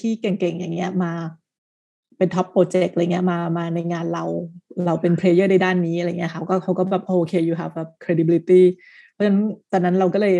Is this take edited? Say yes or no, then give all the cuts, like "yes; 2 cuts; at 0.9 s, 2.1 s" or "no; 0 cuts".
no; 0 cuts